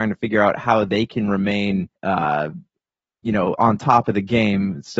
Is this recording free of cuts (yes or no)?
no